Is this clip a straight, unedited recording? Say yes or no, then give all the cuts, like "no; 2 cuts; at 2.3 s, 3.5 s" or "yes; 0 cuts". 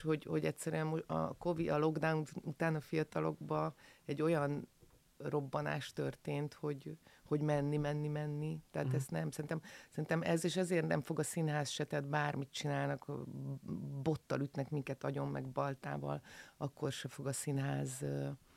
yes; 0 cuts